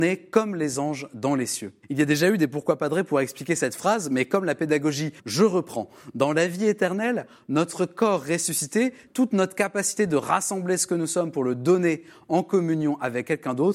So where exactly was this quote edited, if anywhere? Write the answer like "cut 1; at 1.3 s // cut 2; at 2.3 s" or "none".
cut 1; at 1.8 s // cut 2; at 5.2 s // cut 3; at 9.1 s